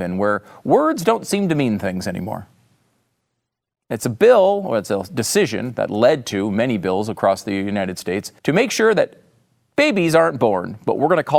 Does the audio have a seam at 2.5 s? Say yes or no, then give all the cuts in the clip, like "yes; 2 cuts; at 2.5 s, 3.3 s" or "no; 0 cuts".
no; 1 cut; at 8.4 s